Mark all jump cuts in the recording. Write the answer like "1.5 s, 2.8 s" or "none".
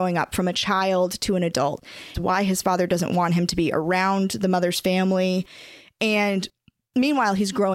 2.1 s